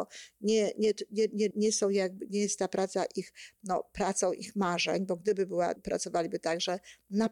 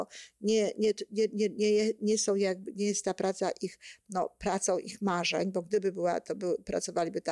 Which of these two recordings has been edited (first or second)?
first